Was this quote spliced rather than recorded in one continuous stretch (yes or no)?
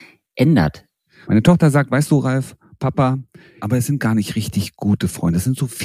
yes